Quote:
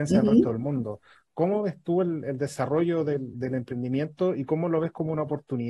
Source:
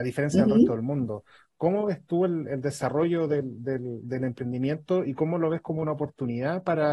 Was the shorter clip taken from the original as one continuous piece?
no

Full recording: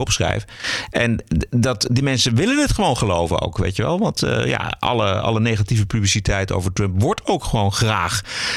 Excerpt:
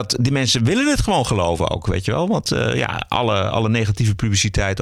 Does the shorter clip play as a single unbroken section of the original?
yes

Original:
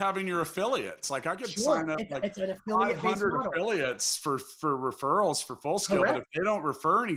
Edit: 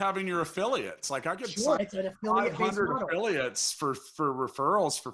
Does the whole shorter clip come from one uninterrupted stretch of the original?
no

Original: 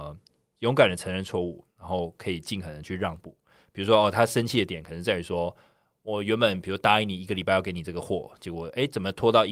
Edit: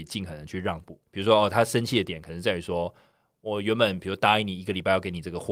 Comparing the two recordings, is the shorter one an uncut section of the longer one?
no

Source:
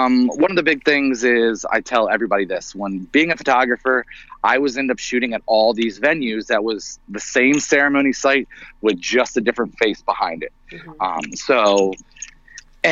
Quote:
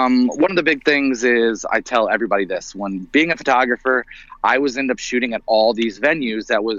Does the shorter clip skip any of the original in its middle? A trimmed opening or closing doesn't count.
no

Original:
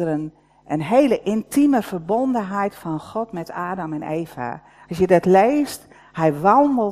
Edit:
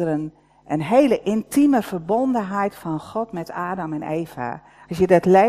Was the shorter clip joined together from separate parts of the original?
no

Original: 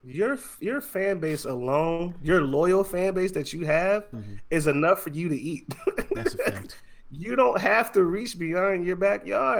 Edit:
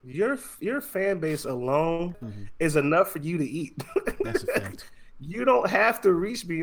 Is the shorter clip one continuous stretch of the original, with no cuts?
no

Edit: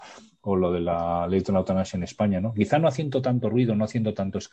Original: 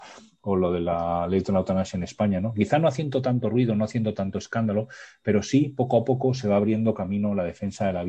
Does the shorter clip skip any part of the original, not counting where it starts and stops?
no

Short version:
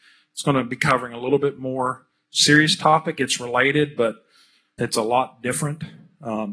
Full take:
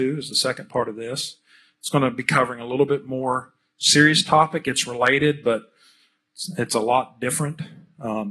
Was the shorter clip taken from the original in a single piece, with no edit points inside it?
no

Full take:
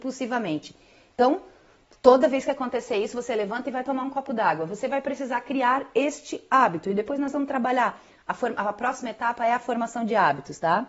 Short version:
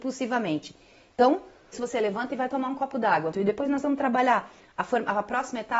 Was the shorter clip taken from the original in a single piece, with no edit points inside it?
no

